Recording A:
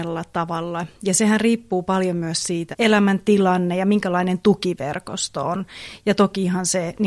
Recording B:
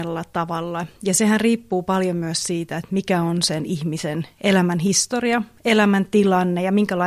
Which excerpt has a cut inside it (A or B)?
A